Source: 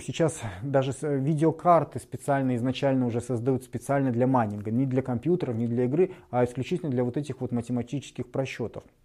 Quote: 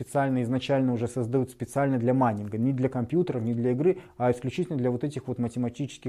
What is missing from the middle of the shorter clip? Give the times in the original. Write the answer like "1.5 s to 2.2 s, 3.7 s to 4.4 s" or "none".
none